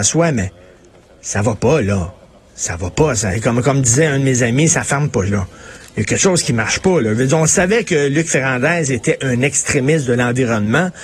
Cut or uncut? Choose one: cut